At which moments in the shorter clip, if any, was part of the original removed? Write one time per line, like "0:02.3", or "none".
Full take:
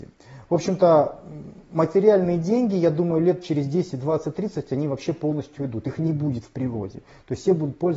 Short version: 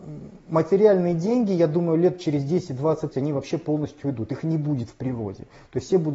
0:03.1